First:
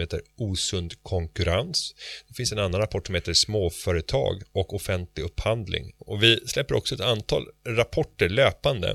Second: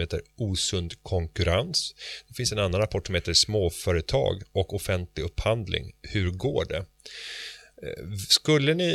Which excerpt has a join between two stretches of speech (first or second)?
first